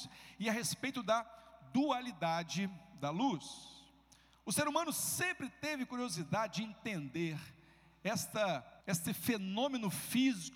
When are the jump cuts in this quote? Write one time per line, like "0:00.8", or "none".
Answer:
0:08.8

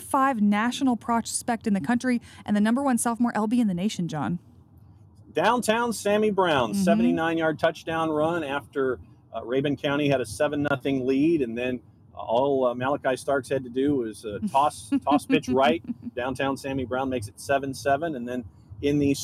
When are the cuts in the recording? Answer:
0:16.1

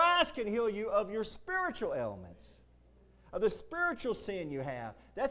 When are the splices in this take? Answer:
none

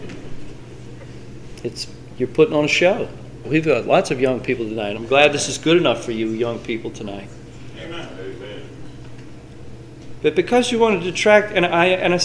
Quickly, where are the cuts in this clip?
0:03.4
0:04.9

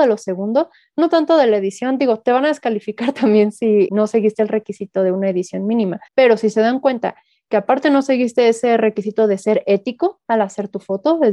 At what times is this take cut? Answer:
0:03.9
0:06.1

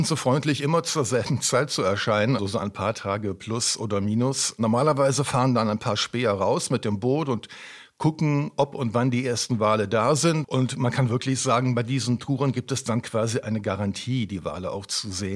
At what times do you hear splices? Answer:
0:02.4
0:10.4

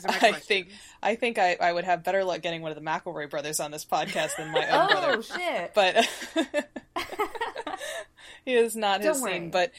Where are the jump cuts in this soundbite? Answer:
none

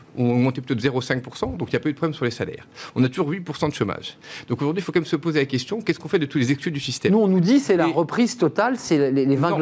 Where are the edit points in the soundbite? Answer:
none

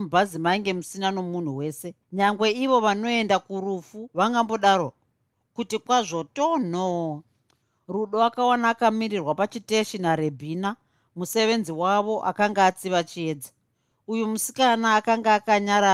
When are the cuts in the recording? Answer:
0:02.0

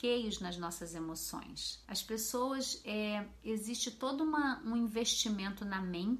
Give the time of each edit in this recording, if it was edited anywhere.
0:01.8

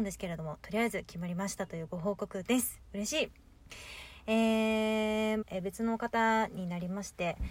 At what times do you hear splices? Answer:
0:05.4

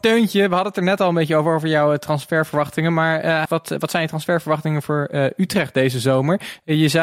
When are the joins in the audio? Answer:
0:03.5

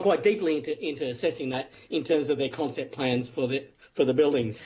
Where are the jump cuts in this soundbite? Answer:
none

